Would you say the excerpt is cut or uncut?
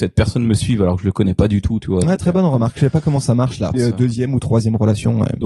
cut